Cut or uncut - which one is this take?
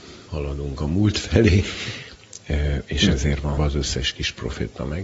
cut